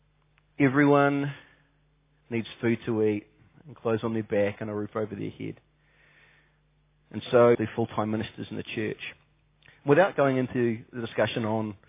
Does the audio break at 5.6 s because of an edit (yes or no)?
no